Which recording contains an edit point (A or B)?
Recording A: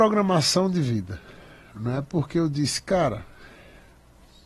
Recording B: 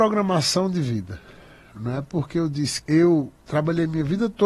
B